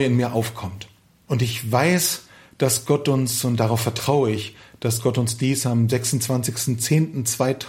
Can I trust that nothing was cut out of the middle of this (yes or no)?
yes